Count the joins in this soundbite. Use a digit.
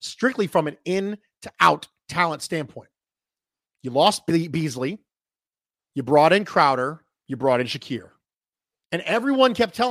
2